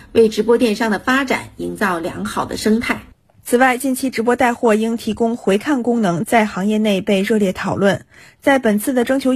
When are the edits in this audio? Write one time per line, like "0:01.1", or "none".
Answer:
none